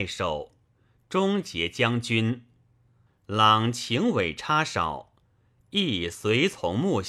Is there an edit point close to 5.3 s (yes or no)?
no